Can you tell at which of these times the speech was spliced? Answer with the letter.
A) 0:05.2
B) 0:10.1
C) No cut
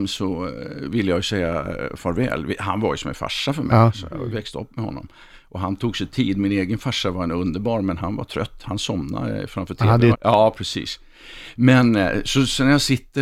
B